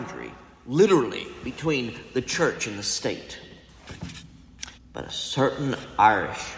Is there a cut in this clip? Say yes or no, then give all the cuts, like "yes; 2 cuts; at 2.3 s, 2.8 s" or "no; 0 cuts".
yes; 1 cut; at 4.8 s